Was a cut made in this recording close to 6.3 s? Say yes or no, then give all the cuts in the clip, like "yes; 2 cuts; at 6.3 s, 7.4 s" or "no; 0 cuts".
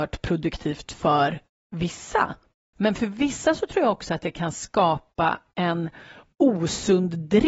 no; 1 cut; at 2.7 s